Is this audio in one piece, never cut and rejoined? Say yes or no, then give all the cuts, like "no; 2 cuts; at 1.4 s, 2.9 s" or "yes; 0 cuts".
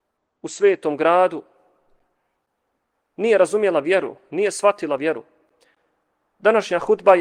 yes; 0 cuts